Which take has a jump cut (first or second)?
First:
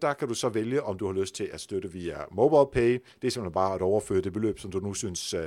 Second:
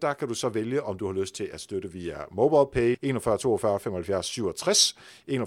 second